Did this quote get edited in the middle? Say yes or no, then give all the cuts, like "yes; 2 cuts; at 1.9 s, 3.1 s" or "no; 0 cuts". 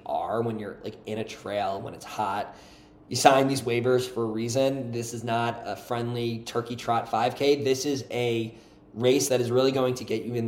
no; 0 cuts